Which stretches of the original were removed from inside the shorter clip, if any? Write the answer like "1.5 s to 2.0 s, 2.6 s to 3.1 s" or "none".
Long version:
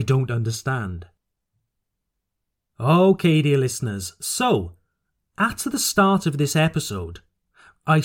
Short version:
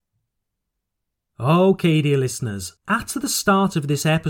4.2 s to 5.3 s